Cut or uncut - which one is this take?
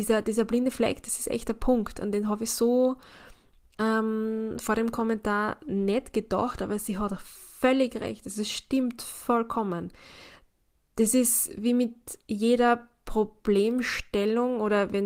uncut